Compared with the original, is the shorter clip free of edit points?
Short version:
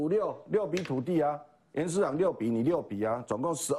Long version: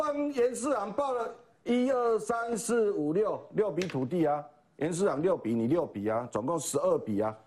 yes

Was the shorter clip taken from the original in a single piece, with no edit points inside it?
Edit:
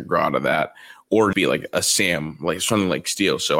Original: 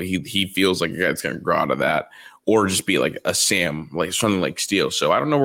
no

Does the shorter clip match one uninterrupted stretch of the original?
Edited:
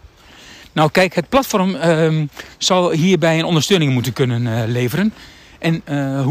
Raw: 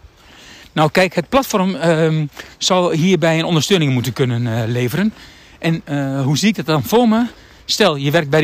yes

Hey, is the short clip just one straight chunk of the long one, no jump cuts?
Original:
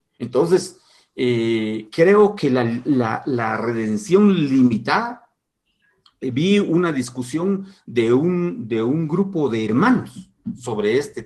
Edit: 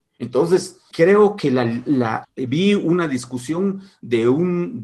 no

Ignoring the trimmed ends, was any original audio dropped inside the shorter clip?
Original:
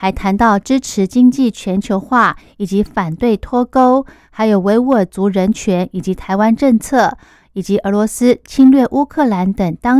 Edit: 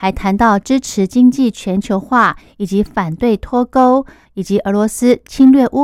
yes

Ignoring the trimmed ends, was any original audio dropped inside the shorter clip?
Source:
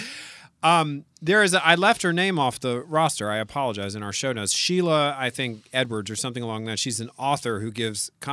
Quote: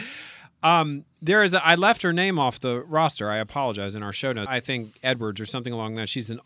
yes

